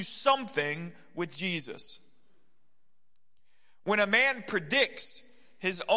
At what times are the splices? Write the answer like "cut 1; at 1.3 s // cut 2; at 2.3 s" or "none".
none